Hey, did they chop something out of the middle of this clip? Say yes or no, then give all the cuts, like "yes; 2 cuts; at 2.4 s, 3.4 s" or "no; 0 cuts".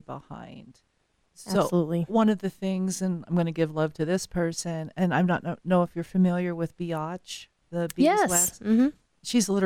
no; 0 cuts